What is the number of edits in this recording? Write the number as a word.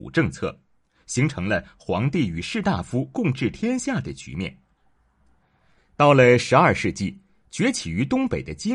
one